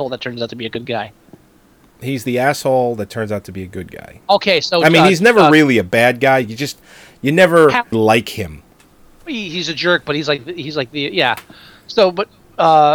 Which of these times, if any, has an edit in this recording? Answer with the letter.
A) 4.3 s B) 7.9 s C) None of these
B